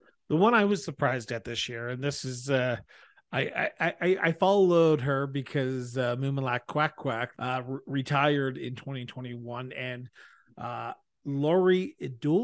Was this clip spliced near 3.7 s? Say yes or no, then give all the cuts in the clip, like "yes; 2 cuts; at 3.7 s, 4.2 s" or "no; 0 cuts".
no; 1 cut; at 7.3 s